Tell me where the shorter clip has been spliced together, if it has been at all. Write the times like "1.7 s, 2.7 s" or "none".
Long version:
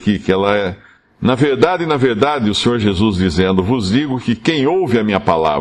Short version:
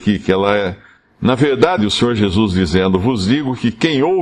1.8 s